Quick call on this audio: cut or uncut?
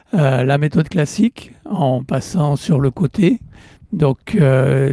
uncut